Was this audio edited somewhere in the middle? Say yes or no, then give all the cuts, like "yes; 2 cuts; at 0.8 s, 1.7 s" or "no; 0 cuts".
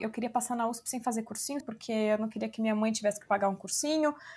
yes; 1 cut; at 1.6 s